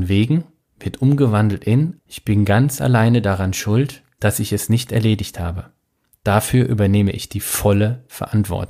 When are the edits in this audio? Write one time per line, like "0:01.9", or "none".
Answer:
0:02.0
0:04.2

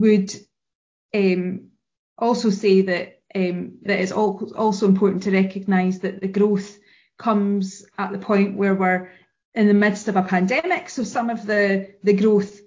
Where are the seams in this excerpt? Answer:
0:03.9

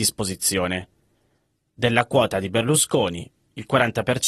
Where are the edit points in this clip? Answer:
none

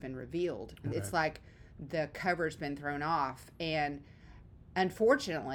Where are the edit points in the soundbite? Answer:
0:00.9

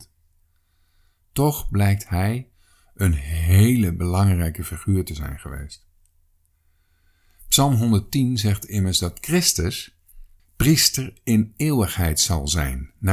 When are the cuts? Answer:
0:10.4

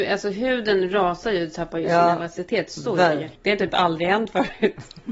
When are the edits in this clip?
0:03.3

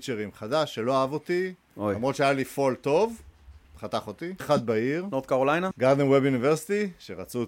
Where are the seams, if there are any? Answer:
0:04.4
0:05.7

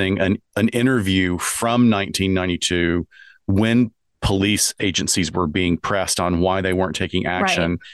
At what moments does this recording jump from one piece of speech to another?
none

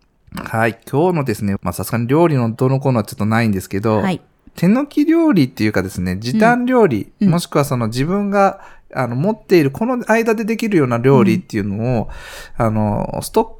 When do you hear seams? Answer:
0:01.6

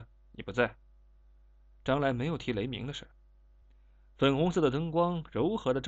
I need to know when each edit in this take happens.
none

